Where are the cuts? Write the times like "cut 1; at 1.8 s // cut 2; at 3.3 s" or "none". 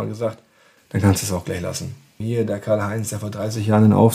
cut 1; at 2.2 s